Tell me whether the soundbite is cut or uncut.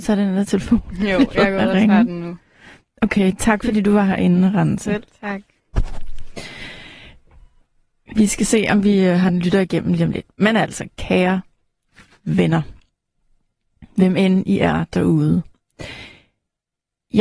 uncut